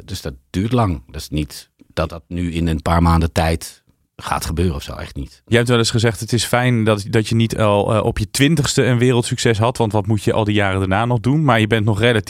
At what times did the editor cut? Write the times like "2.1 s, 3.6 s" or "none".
none